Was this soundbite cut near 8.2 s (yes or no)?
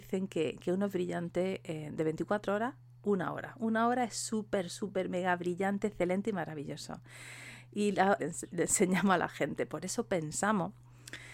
yes